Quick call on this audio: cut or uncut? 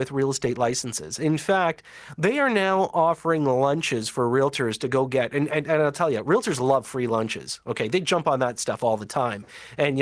uncut